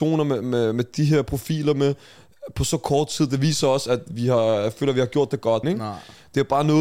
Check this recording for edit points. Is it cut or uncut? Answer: cut